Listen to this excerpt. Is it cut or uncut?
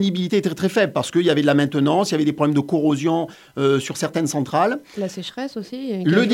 uncut